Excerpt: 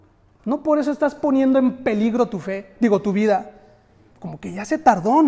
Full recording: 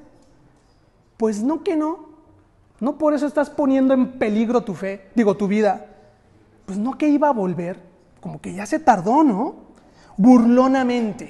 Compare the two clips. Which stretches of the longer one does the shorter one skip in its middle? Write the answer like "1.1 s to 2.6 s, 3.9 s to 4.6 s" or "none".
6.5 s to 8.1 s

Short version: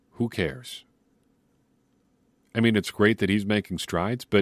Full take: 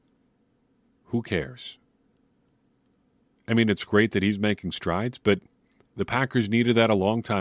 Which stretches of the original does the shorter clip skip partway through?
none

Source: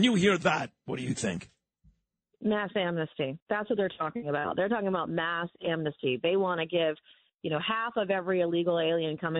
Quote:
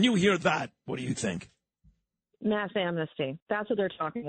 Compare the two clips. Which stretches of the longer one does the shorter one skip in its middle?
none

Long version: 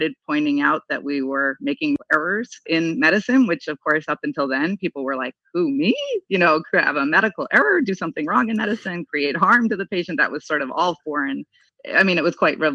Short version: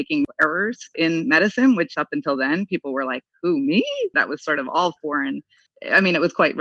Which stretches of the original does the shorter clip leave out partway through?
3.7 s to 4.1 s, 6.3 s to 10.2 s

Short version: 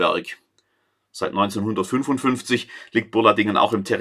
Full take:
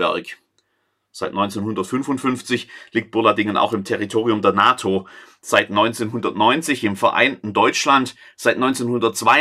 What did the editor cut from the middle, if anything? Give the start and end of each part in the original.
none

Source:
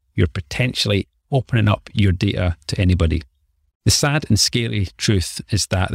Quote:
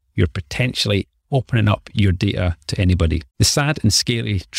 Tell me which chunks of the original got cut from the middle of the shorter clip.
3.3 s to 3.8 s

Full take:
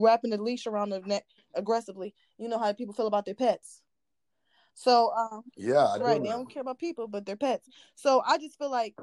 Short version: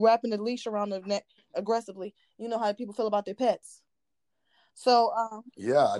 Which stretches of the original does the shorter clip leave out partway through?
none

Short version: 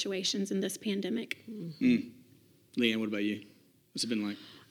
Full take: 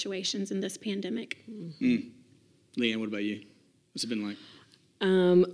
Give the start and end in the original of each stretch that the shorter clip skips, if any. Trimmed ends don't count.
none

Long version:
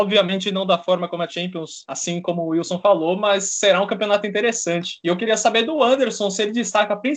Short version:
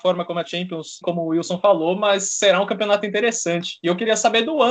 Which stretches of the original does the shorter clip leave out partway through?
1.8 s to 2.2 s

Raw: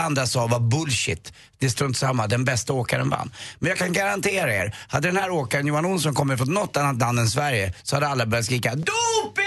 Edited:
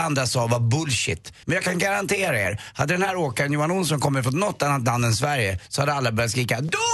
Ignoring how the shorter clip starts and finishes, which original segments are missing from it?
1.4 s to 3.6 s

